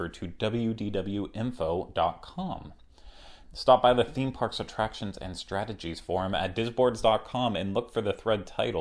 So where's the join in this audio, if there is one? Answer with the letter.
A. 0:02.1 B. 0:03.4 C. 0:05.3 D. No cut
B